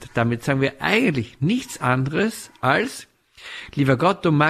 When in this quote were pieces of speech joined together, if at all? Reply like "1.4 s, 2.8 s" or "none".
none

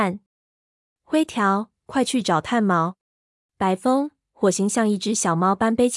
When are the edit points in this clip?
3.4 s

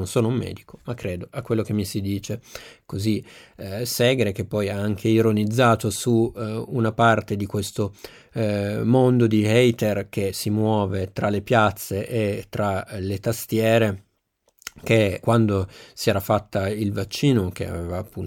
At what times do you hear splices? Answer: 15.2 s

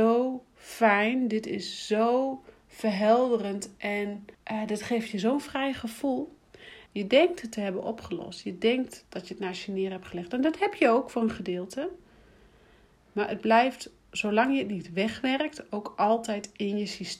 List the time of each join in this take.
4.3 s, 6.9 s

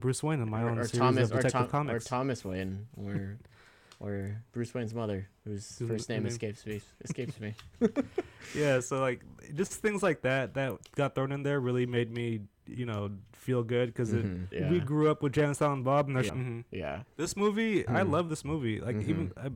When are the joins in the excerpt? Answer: 14.5 s, 16.3 s, 17.9 s

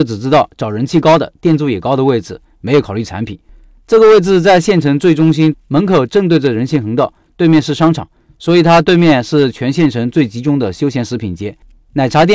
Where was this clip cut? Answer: 5.5 s

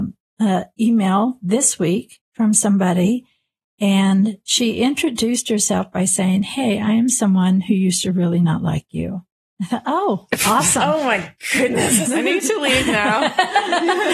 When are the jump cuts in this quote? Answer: 12.0 s

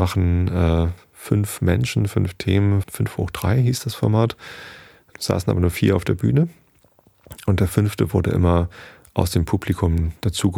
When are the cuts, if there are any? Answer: 2.8 s, 5.1 s

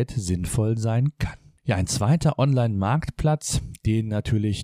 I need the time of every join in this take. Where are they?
none

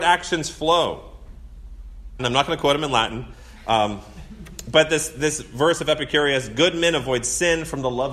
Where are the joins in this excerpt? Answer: 2.2 s

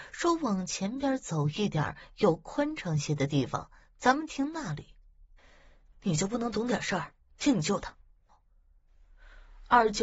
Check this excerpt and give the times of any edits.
5.4 s, 8.3 s

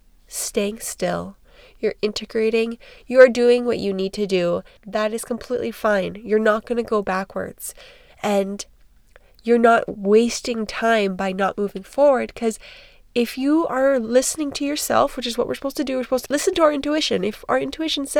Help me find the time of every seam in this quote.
4.8 s, 16.3 s

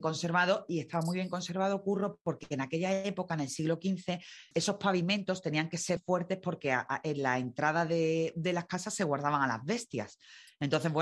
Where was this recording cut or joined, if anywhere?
4.5 s, 6.0 s

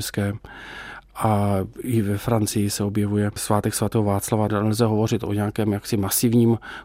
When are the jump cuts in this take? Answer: 4.5 s

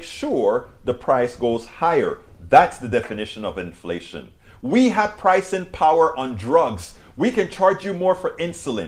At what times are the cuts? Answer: none

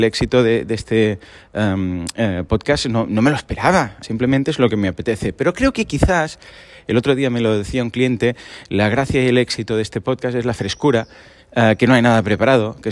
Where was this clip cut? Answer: 4.0 s

